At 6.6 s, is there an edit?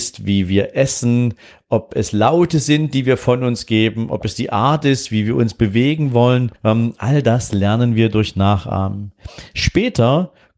yes; 1 cut; at 6.6 s

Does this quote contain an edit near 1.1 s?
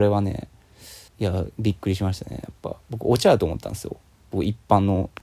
yes; 2 cuts; at 1.1 s, 2.8 s

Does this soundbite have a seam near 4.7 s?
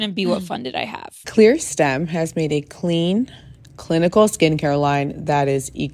no; 1 cut; at 1.2 s

